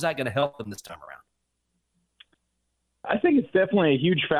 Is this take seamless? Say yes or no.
yes